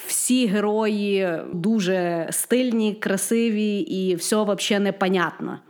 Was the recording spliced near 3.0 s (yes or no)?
no